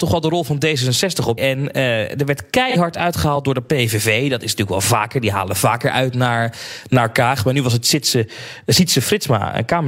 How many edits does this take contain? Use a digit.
1